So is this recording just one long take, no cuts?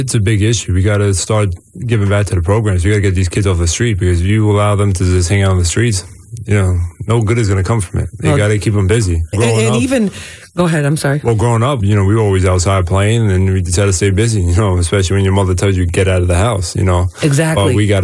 no; 2 cuts; at 9.3 s, 11.8 s

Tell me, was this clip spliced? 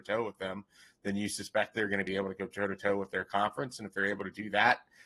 no; 0 cuts

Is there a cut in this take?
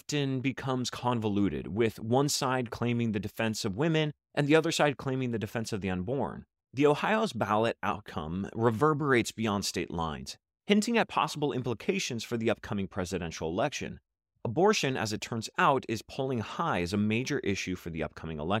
yes; 1 cut; at 6.6 s

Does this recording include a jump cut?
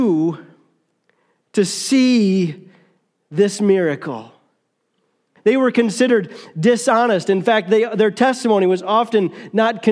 yes; 1 cut; at 5.4 s

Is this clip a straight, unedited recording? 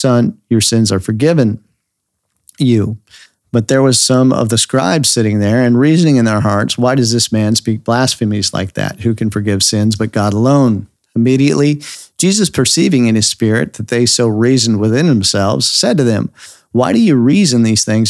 yes; 0 cuts

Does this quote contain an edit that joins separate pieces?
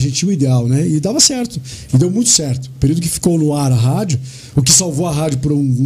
no; 0 cuts

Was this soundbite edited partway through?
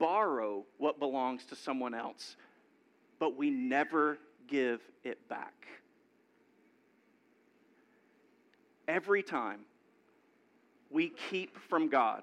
no; 0 cuts

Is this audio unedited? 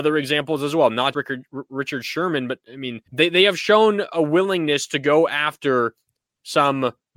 no; 2 cuts; at 1.1 s, 3.1 s

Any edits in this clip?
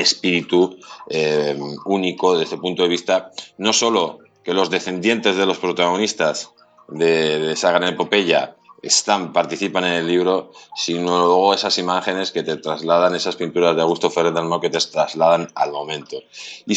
no; 0 cuts

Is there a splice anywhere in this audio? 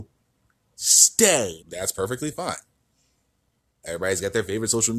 yes; 1 cut; at 1.6 s

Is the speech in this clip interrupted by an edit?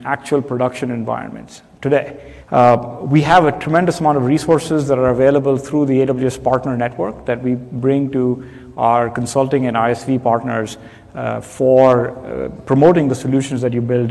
yes; 1 cut; at 2.4 s

